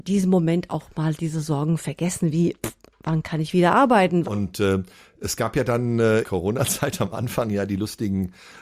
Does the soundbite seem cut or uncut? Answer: cut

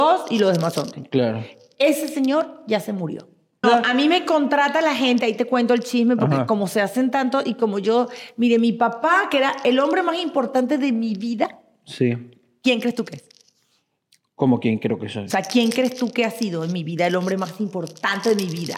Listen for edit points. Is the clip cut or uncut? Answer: cut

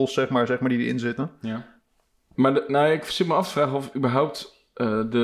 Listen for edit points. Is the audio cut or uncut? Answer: cut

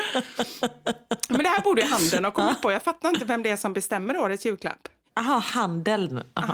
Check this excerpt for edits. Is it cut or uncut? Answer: cut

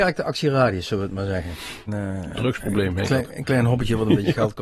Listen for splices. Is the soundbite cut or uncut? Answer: cut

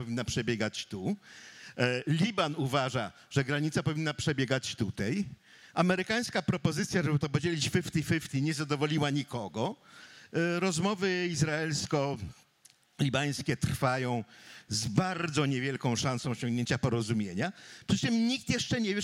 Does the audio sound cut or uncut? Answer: uncut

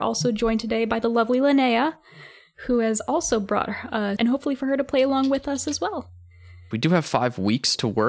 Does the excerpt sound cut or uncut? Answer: cut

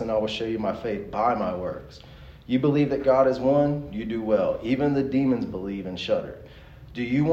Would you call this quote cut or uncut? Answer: uncut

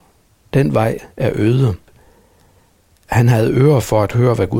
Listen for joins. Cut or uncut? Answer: uncut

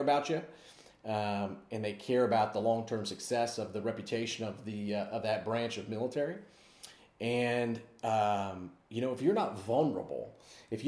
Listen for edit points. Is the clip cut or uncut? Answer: uncut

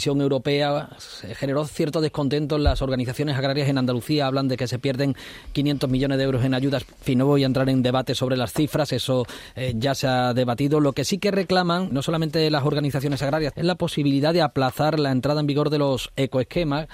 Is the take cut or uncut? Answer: cut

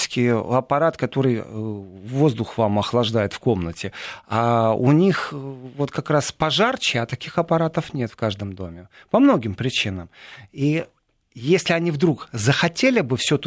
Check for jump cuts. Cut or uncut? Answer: uncut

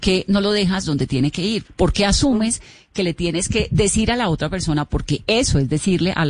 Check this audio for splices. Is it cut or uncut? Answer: cut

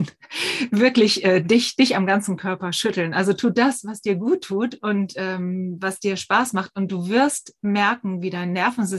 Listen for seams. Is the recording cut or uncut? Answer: uncut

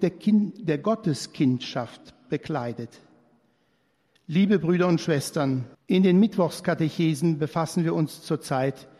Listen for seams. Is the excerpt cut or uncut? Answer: cut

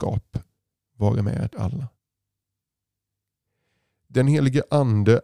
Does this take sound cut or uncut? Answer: cut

